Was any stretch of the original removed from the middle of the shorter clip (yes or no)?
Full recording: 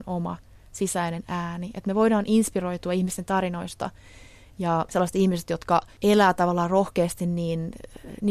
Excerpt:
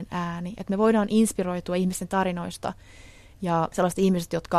no